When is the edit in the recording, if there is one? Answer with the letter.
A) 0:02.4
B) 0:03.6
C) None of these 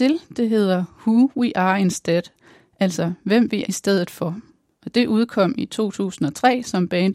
B